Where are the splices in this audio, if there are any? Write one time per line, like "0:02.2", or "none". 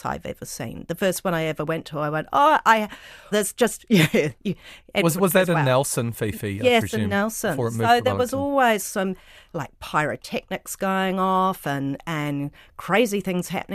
0:03.3